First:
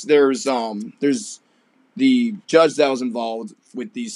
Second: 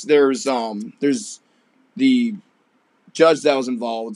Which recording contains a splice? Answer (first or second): first